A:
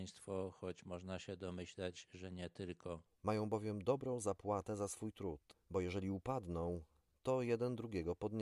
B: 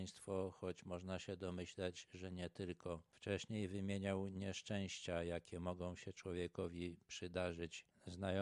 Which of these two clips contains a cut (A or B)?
A